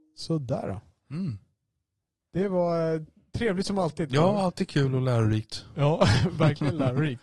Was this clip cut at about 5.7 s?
no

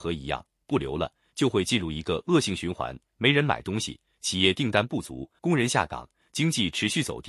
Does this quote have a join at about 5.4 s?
yes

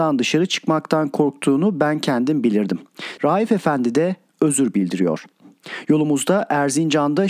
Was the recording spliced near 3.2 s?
yes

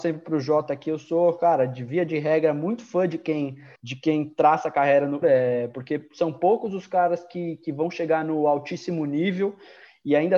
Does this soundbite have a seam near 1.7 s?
no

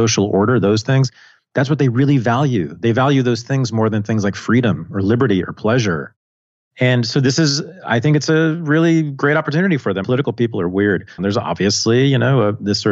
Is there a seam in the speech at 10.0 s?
yes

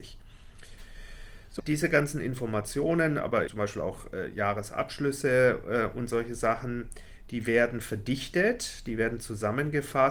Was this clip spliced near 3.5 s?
yes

